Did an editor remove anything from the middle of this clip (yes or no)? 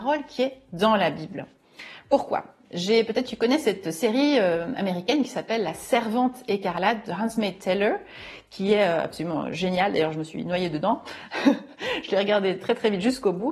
no